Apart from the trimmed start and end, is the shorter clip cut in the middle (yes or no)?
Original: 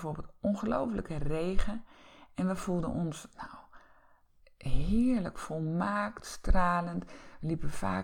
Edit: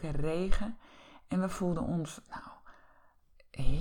no